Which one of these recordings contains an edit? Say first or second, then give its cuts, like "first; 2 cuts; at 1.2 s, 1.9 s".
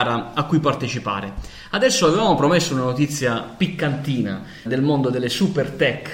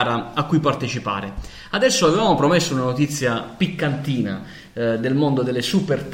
first; 1 cut; at 4.7 s